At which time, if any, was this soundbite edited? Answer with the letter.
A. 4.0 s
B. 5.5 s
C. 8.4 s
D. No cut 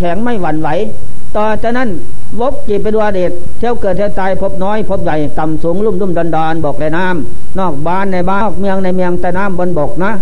C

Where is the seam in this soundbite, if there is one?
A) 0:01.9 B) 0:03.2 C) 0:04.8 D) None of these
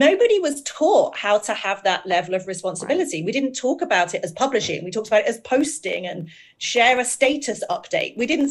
D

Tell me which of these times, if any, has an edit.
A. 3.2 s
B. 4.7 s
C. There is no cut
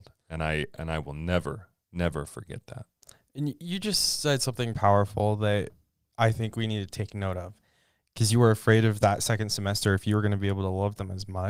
B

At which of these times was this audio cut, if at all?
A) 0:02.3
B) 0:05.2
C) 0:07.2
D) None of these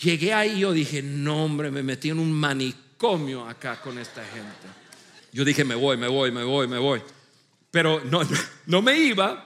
B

